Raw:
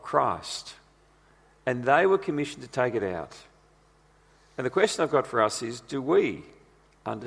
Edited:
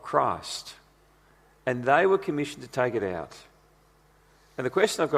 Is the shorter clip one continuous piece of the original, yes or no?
yes